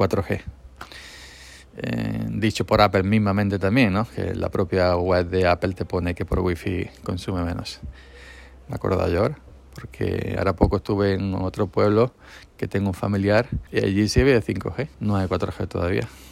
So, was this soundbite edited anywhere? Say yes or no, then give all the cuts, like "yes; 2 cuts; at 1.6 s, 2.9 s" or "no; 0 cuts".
yes; 3 cuts; at 8.6 s, 13.7 s, 14.9 s